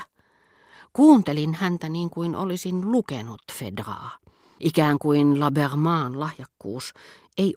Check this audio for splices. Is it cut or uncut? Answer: cut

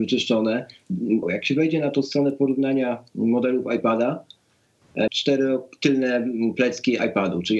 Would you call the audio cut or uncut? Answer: cut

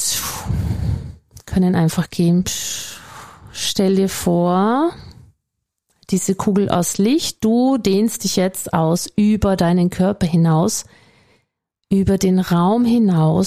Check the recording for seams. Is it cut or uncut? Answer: cut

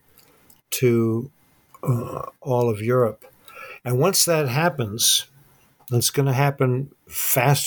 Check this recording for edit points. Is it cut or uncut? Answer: uncut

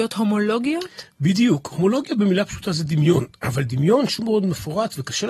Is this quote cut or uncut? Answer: cut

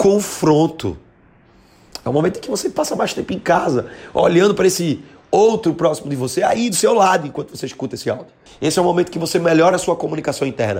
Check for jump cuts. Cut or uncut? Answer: cut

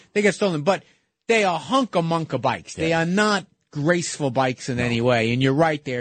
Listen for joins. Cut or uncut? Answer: uncut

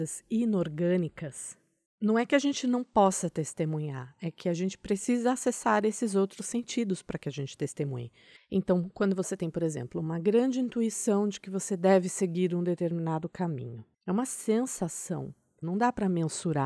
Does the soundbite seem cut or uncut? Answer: cut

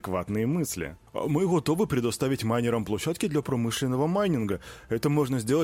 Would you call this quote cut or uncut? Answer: uncut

